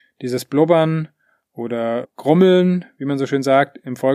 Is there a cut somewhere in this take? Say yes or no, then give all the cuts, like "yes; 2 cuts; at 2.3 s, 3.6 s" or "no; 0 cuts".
yes; 1 cut; at 2.0 s